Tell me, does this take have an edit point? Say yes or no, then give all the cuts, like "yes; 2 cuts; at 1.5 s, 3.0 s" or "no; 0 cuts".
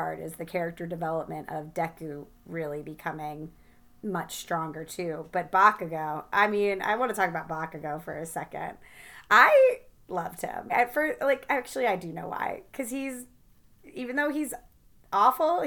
yes; 1 cut; at 10.7 s